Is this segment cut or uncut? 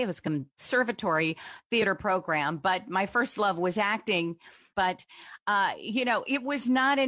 cut